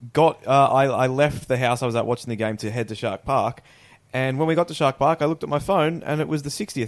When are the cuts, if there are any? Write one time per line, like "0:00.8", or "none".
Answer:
none